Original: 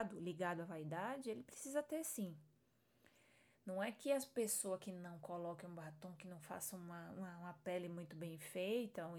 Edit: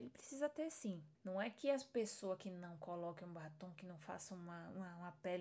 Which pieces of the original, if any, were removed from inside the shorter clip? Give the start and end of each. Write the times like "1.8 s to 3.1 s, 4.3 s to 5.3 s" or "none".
2.5 s to 3.6 s